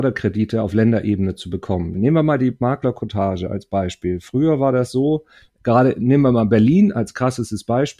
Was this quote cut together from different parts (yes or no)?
yes